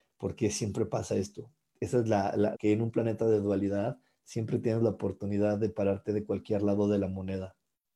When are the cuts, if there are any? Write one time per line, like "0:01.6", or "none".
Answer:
0:02.5